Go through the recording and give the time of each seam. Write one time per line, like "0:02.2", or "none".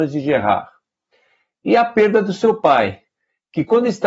none